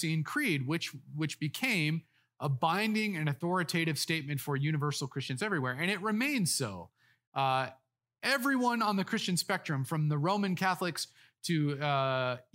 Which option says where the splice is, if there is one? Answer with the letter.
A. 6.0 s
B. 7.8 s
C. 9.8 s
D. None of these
D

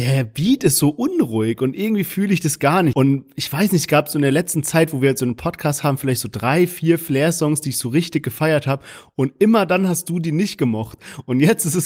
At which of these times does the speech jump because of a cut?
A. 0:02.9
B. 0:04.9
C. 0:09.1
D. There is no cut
A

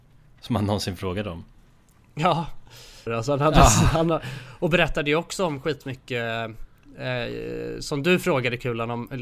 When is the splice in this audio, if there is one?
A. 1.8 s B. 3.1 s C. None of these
B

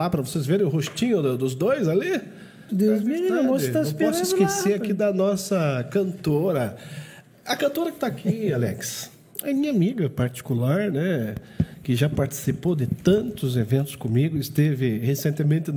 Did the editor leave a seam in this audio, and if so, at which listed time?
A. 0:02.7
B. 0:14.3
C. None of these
A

